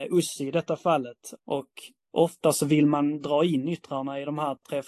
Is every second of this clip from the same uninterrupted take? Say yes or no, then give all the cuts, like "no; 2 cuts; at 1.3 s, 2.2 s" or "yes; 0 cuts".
no; 1 cut; at 1.4 s